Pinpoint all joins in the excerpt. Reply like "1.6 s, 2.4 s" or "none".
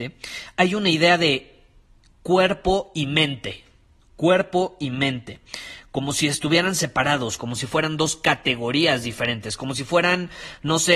7.4 s